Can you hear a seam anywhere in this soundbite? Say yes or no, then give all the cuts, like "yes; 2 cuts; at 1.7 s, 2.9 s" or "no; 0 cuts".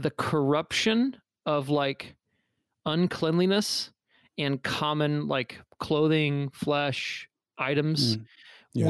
no; 0 cuts